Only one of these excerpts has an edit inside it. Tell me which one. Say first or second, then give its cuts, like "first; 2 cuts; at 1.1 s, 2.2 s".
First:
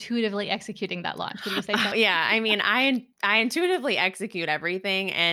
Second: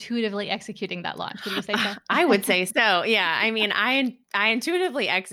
first; 1 cut; at 1.9 s